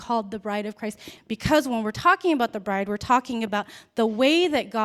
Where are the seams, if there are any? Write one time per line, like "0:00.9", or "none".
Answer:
0:01.2